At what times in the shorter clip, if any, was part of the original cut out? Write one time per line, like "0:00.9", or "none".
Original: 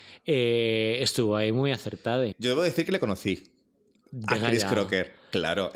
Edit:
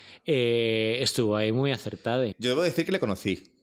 none